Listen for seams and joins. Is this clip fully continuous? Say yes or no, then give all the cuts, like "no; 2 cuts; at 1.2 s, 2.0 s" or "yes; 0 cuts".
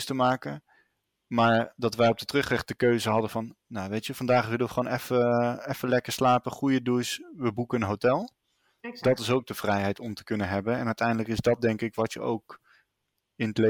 yes; 0 cuts